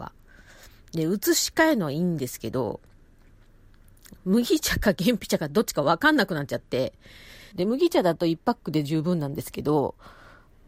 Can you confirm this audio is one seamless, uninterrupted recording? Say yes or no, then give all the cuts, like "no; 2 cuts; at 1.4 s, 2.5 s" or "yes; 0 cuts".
no; 2 cuts; at 4.2 s, 7.5 s